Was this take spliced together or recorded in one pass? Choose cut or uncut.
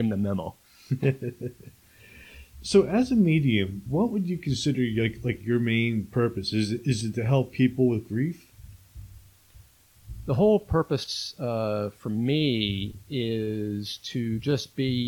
cut